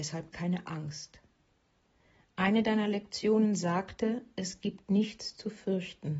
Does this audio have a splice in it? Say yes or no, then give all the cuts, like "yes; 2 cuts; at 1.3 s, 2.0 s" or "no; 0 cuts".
no; 0 cuts